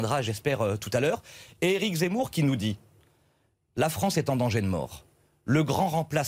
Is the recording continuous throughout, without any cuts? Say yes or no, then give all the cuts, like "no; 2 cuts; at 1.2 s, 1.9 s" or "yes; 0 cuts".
yes; 0 cuts